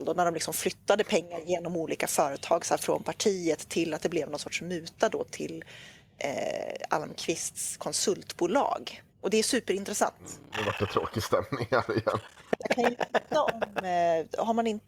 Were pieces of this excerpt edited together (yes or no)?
yes